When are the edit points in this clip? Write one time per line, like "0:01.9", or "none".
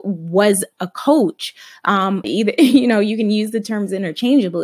0:02.2